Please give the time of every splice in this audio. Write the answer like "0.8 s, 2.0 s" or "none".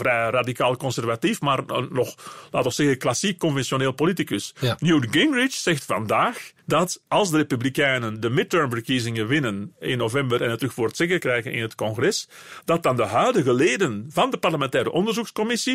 6.6 s